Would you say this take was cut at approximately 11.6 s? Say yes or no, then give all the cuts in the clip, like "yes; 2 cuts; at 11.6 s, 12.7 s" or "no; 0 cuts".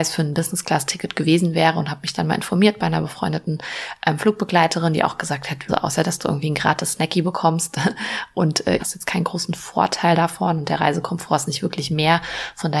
no; 2 cuts; at 5.7 s, 8.8 s